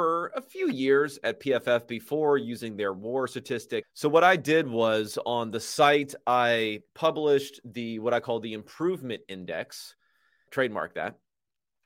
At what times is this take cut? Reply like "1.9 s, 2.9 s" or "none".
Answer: 3.8 s, 6.9 s, 10.5 s